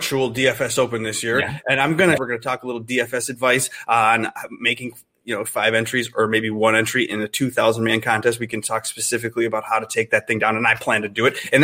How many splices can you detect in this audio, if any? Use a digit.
1